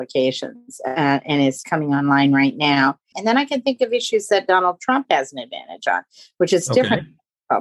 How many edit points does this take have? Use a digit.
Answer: 2